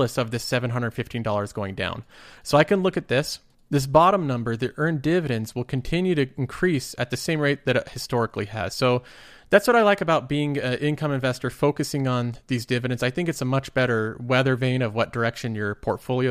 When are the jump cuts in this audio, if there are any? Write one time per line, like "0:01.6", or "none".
none